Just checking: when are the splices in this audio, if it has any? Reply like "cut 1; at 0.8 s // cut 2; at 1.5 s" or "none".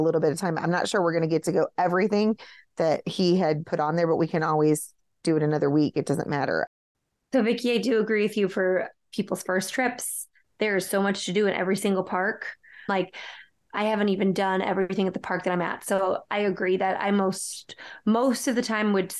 cut 1; at 12.9 s

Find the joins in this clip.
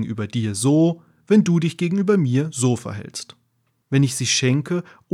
cut 1; at 3.8 s

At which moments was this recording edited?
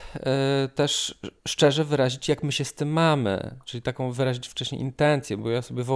cut 1; at 1.4 s

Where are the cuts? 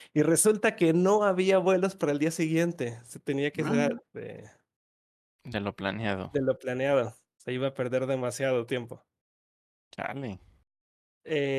cut 1; at 4.0 s

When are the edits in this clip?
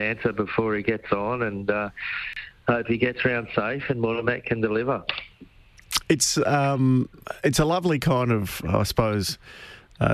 none

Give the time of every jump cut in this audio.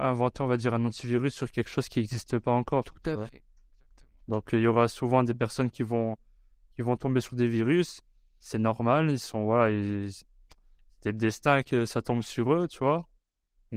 none

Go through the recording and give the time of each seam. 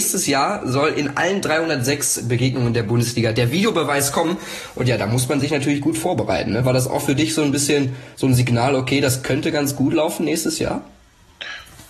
none

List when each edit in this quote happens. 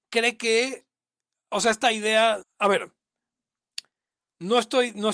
cut 1; at 2.4 s

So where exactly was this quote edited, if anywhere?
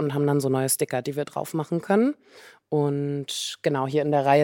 none

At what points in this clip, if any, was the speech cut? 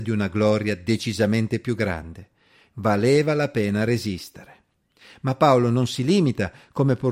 none

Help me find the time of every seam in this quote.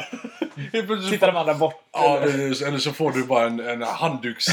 none

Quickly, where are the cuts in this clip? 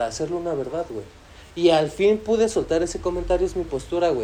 none

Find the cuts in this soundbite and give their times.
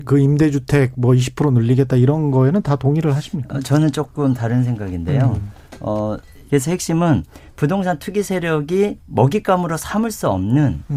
cut 1; at 6.5 s // cut 2; at 9.0 s

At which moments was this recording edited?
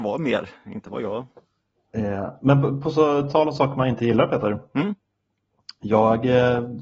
none

